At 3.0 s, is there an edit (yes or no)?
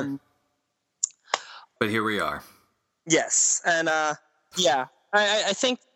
no